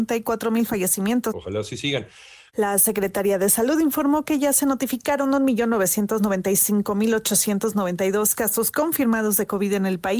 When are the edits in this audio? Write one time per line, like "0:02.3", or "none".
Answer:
0:01.3
0:02.5